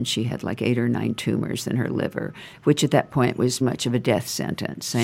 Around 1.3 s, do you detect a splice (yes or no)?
no